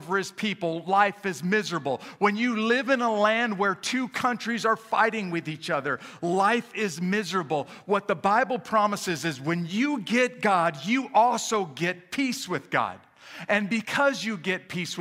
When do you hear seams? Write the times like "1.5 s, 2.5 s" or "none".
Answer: none